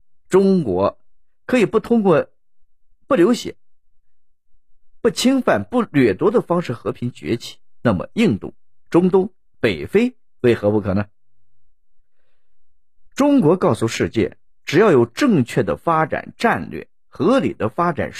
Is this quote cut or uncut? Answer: uncut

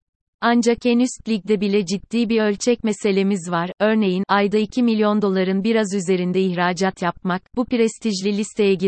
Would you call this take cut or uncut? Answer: uncut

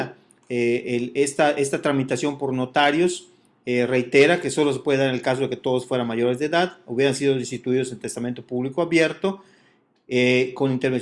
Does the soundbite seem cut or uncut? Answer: uncut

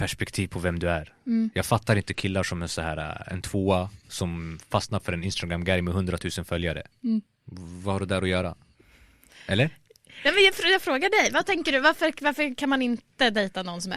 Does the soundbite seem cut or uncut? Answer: uncut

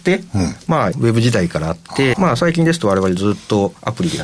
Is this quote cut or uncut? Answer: cut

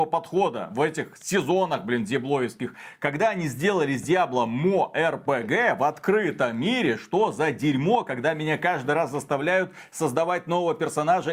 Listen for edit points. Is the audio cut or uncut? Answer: uncut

